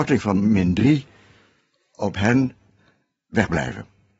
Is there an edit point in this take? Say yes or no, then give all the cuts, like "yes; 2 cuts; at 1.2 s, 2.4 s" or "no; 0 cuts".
no; 0 cuts